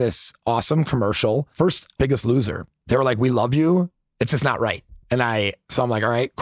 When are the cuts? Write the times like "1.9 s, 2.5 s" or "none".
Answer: 2.0 s, 5.0 s